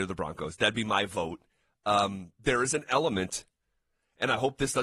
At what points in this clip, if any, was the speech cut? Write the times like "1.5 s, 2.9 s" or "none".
none